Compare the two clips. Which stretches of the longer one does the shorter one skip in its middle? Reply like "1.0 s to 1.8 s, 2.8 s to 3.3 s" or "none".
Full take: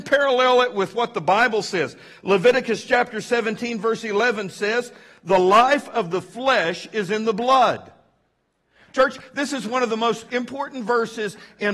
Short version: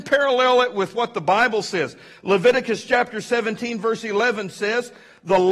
none

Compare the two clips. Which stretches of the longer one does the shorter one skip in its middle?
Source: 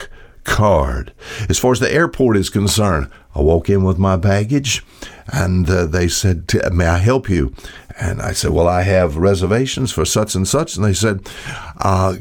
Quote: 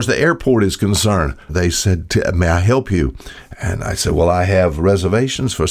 3.2 s to 5.9 s

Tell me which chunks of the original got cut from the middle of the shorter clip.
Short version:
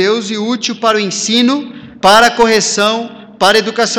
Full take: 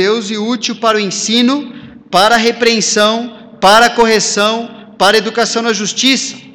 2.0 s to 3.6 s

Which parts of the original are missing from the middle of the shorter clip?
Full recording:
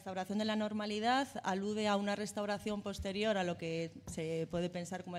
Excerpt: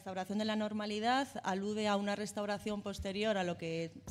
none

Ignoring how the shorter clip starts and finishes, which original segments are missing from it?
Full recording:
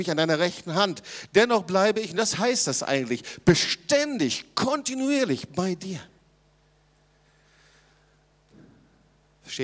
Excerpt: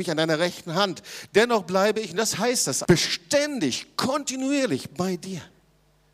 2.8 s to 3.4 s

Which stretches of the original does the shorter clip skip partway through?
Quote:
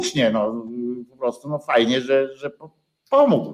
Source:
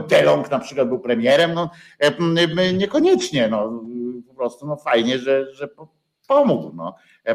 none

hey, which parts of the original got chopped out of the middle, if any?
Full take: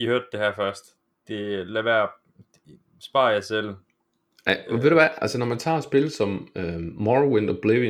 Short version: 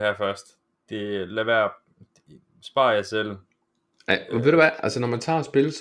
none

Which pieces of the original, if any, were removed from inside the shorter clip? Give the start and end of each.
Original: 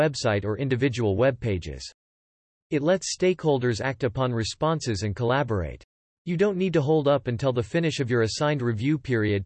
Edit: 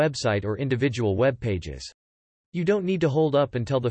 2.3 s to 6.1 s

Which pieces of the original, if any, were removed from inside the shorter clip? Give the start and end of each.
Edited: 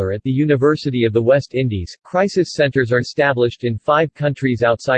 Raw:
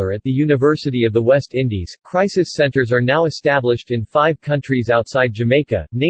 3.0 s to 3.3 s

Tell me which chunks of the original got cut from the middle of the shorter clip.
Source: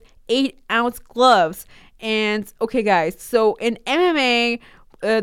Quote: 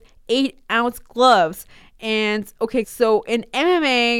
2.8 s to 3.2 s

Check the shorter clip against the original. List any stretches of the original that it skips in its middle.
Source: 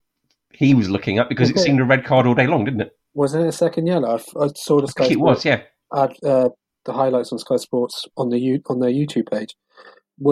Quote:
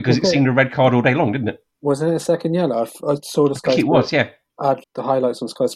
6.2 s to 6.7 s

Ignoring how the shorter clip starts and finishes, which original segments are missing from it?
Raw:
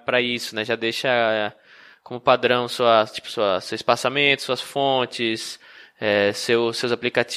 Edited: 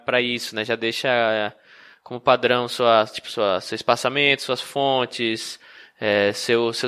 none

